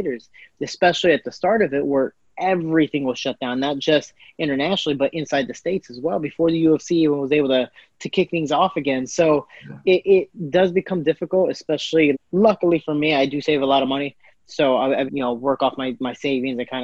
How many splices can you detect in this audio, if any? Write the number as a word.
two